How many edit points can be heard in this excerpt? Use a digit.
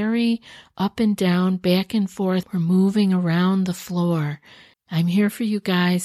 2